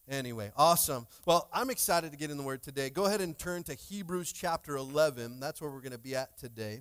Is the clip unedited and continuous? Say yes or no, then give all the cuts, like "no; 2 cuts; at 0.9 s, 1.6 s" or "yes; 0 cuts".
yes; 0 cuts